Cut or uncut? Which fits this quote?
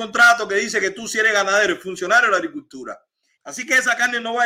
cut